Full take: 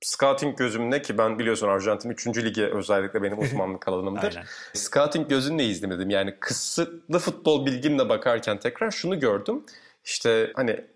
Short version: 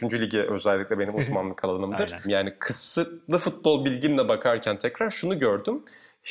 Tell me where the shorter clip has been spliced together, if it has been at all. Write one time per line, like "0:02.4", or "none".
0:02.2